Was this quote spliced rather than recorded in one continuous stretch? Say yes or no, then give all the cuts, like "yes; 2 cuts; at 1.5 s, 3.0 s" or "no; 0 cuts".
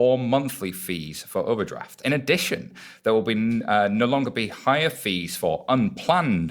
no; 0 cuts